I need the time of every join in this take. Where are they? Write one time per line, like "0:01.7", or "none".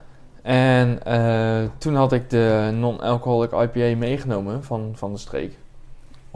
none